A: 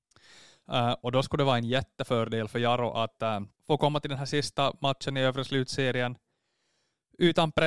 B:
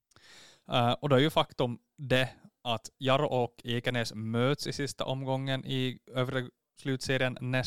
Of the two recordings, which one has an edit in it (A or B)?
A